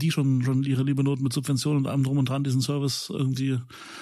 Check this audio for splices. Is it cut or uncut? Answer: uncut